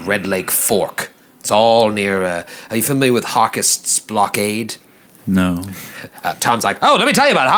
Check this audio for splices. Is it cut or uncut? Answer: cut